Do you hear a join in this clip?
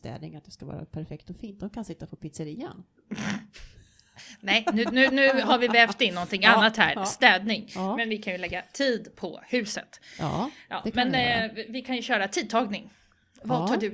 no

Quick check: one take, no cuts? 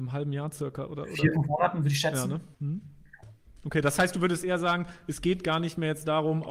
no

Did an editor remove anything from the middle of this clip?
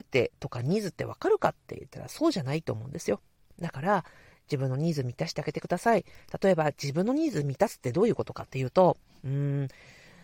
no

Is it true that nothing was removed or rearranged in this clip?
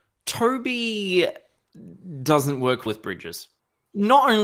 no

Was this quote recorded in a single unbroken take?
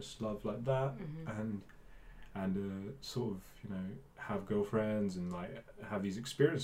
yes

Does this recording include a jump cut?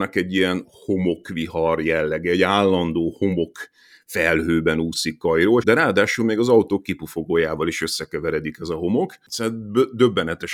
yes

